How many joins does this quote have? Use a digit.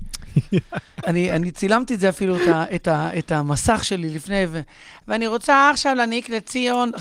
1